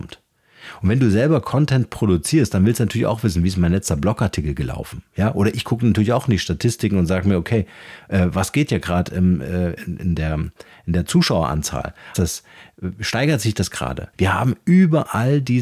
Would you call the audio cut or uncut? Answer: cut